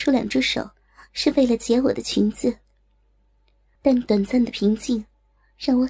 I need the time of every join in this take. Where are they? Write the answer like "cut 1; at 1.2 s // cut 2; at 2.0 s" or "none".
cut 1; at 3.8 s